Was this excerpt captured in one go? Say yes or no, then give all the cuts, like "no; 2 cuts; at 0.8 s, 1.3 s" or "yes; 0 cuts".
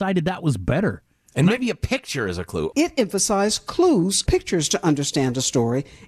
no; 2 cuts; at 2.7 s, 4.3 s